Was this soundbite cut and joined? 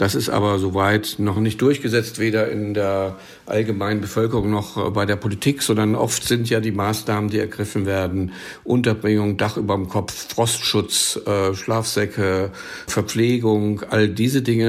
no; 0 cuts

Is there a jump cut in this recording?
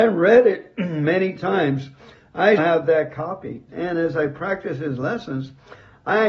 yes; 2 cuts; at 2.6 s, 3.7 s

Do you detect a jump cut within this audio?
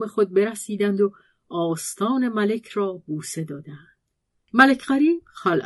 no; 0 cuts

